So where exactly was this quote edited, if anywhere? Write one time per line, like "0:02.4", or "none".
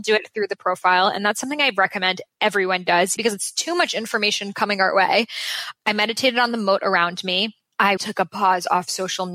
0:03.2
0:08.0